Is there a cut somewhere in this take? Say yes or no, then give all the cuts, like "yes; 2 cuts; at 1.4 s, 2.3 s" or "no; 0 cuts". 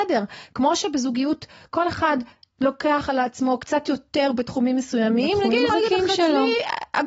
yes; 1 cut; at 5.7 s